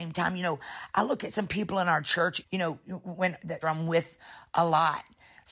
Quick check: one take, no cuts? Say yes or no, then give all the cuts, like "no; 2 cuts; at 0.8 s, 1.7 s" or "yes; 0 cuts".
no; 2 cuts; at 2.4 s, 3.6 s